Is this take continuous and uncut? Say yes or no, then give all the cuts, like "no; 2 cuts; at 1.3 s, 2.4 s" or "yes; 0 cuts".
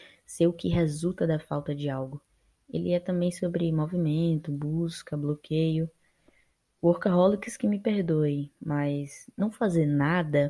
yes; 0 cuts